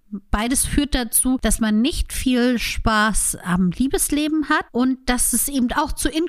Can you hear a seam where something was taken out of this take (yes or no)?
no